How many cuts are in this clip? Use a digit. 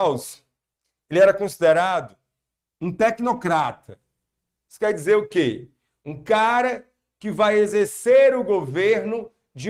0